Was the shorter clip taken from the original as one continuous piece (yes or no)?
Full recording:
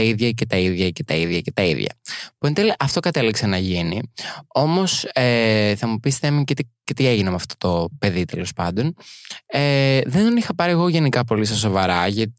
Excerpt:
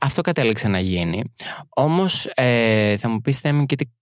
yes